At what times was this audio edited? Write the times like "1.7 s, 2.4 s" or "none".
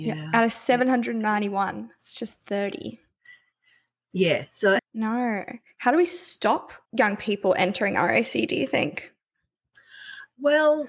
4.8 s, 6.8 s